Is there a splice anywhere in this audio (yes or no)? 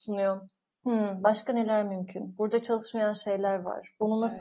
no